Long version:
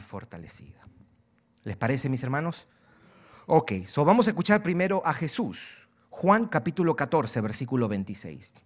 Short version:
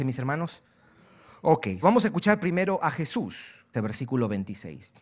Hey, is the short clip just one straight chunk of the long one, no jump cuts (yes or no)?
no